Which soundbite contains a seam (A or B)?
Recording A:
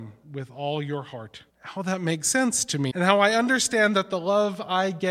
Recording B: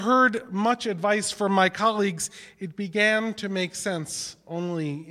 A